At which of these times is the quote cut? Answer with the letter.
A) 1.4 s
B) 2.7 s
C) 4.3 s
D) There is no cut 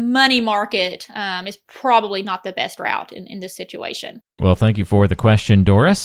C